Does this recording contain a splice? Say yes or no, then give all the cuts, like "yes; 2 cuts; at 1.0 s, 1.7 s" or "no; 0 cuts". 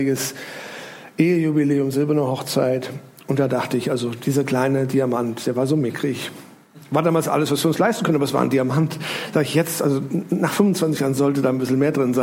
no; 0 cuts